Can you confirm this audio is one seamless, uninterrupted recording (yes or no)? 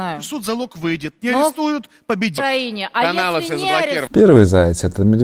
no